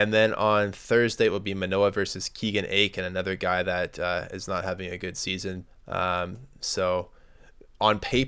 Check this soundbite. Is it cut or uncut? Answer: cut